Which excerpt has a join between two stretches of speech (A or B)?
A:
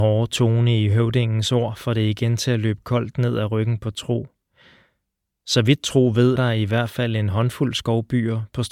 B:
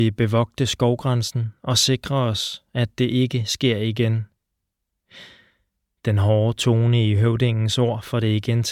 A